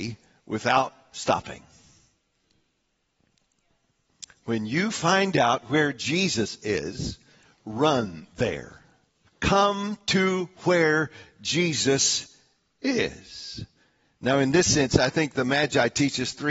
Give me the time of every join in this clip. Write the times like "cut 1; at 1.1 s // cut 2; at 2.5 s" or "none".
cut 1; at 9.3 s

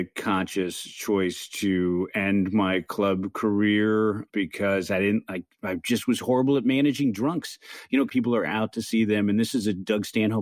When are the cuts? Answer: cut 1; at 8.1 s

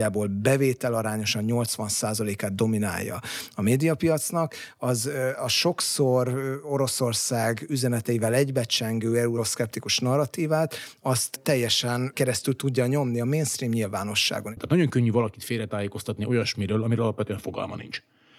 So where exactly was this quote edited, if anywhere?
cut 1; at 14.6 s

